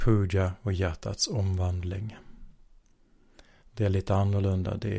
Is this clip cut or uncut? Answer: cut